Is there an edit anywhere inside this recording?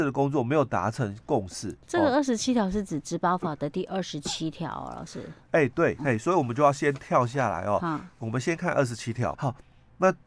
yes; 2 cuts; at 6.0 s, 9.3 s

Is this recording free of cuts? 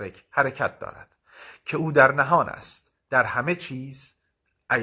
yes; 0 cuts

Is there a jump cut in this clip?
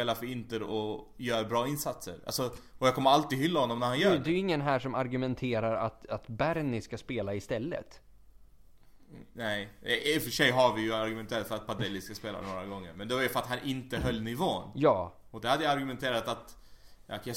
no; 0 cuts

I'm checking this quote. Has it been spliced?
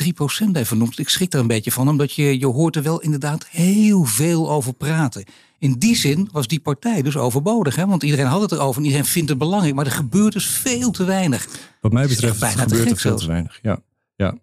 no; 0 cuts

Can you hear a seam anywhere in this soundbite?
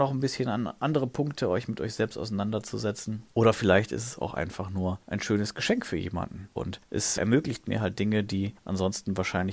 yes; 1 cut; at 6.6 s

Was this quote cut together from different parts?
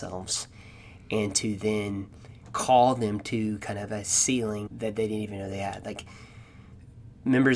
yes; 1 cut; at 4.7 s

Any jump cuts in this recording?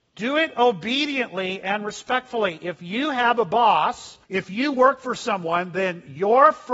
yes; 1 cut; at 4.2 s

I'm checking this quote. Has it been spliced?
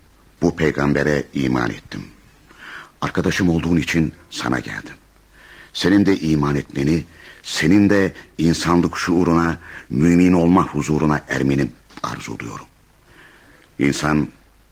no; 0 cuts

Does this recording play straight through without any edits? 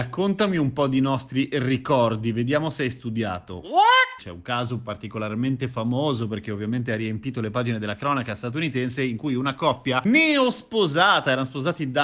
no; 1 cut; at 4.2 s

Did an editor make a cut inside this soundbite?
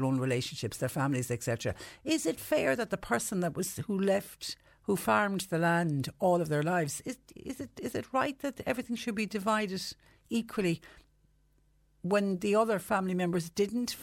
no; 0 cuts

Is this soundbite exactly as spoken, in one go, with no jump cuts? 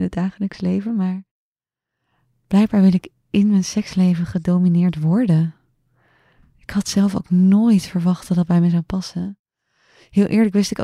yes; 0 cuts

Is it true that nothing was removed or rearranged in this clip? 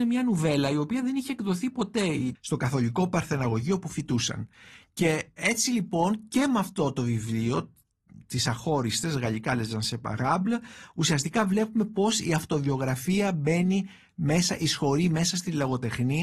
no; 1 cut; at 2.4 s

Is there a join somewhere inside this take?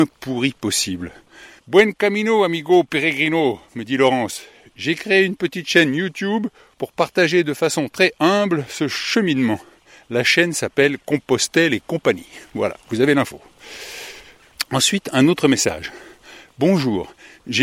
yes; 1 cut; at 1.6 s

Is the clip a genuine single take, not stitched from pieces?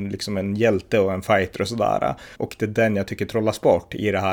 no; 1 cut; at 2.3 s

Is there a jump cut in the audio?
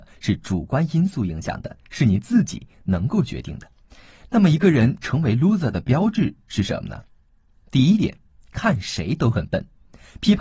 no; 0 cuts

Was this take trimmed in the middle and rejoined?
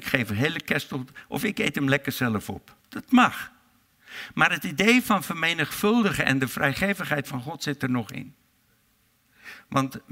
yes; 1 cut; at 2.8 s

